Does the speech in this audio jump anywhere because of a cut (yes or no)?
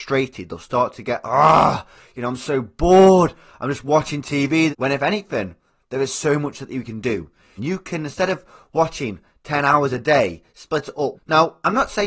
yes